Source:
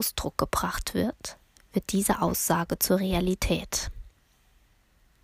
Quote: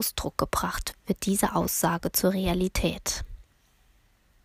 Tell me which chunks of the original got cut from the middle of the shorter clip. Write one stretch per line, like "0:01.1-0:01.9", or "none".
0:00.9-0:01.6